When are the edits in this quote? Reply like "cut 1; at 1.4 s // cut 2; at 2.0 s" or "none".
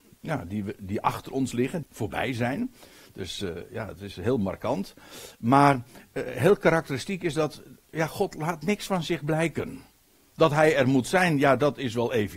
cut 1; at 1.8 s